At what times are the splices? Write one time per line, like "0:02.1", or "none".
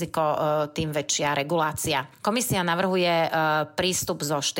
none